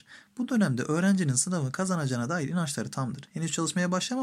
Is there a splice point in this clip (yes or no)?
no